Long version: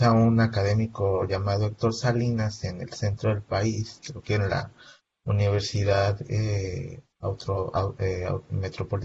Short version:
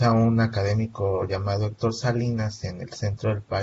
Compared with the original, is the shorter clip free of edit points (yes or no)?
yes